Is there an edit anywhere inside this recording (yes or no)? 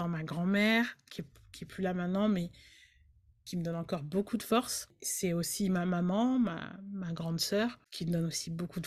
no